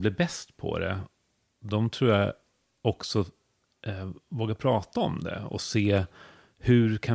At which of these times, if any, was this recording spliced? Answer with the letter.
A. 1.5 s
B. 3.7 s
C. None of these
C